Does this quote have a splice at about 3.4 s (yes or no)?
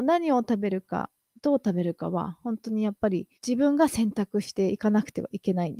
yes